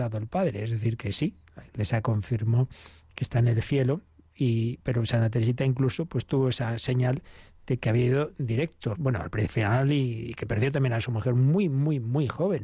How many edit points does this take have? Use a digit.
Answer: 1